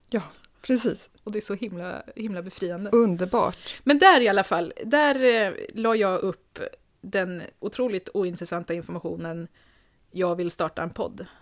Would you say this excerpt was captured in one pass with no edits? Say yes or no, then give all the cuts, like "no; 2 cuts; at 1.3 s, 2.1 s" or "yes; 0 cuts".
yes; 0 cuts